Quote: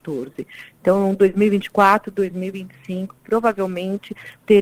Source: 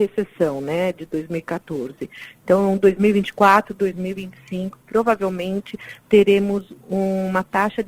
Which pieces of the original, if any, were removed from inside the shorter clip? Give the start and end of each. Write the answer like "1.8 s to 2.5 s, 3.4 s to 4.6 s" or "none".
none

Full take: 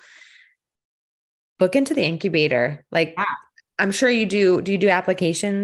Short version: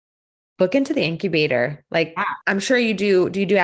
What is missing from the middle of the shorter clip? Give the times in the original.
3.4 s to 3.7 s

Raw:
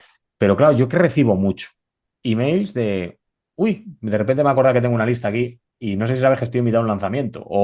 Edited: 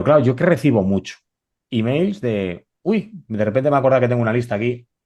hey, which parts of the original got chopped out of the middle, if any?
3.3 s to 3.5 s

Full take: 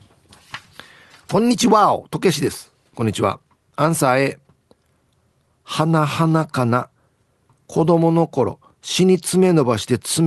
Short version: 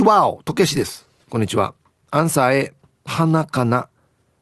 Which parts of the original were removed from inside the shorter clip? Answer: 4.7 s to 6.1 s

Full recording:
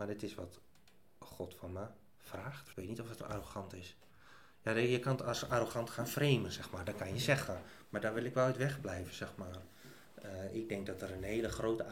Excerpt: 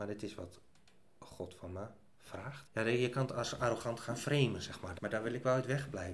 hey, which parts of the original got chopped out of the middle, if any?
2.6 s to 4.5 s, 6.9 s to 7.9 s

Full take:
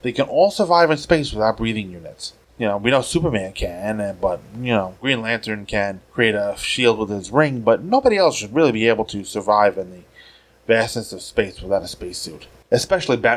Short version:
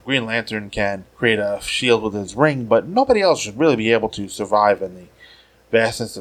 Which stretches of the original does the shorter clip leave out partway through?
none

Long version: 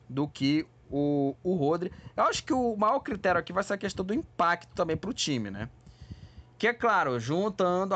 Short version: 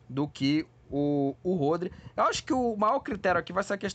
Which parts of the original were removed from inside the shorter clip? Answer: none

